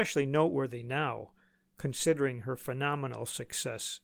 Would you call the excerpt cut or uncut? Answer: uncut